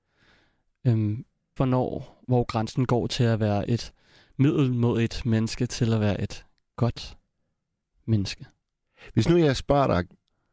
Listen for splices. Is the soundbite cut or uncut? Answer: cut